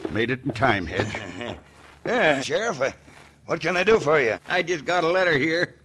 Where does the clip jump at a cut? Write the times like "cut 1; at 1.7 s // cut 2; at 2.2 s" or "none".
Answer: cut 1; at 2.4 s // cut 2; at 4.3 s

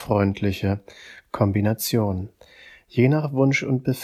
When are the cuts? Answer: none

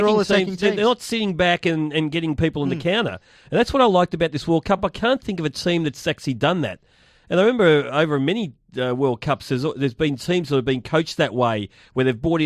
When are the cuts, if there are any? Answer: none

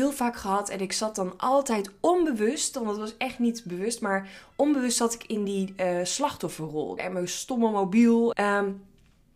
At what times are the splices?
cut 1; at 7.0 s // cut 2; at 8.3 s

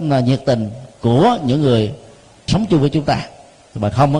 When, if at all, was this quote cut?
cut 1; at 2.5 s

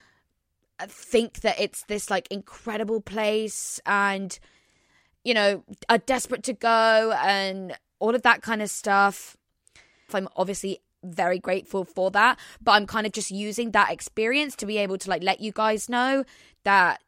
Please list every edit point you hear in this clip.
cut 1; at 10.1 s

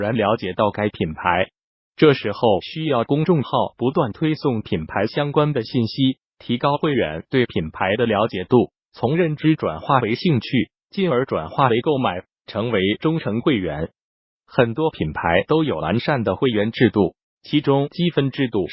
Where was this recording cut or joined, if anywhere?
cut 1; at 14.3 s // cut 2; at 17.2 s

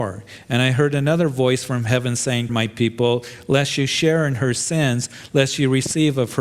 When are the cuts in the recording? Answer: cut 1; at 2.5 s

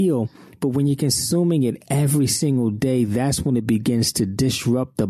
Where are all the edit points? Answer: none

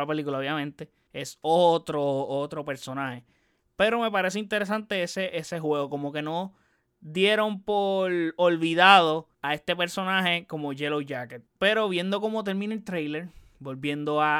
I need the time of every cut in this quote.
cut 1; at 1.1 s // cut 2; at 9.3 s // cut 3; at 11.5 s

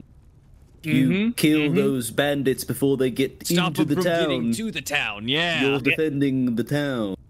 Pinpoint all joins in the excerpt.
cut 1; at 5.8 s

